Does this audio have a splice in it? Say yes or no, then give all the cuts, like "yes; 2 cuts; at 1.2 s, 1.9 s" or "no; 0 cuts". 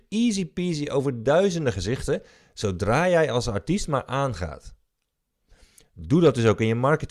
no; 0 cuts